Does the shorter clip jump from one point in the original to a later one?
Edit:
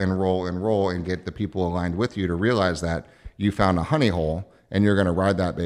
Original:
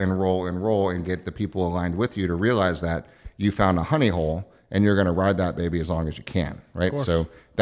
no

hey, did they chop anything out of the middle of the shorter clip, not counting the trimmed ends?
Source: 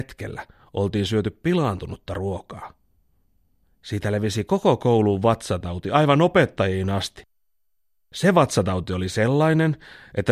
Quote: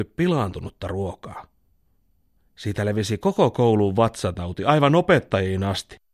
no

